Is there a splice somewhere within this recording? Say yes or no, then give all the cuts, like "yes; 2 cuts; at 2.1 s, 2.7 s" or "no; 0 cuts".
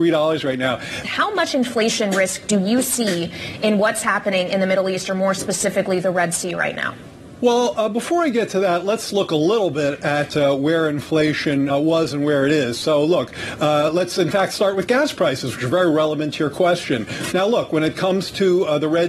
yes; 3 cuts; at 1.0 s, 11.7 s, 17.3 s